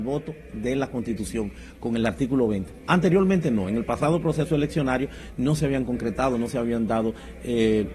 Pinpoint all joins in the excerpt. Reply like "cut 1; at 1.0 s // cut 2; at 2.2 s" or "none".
none